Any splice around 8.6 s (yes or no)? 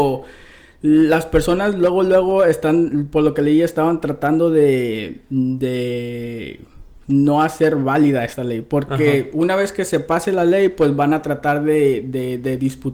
no